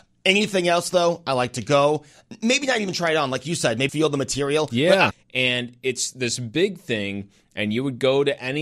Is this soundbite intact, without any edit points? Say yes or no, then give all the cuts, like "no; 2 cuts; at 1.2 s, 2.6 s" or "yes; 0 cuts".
no; 2 cuts; at 3.9 s, 5.1 s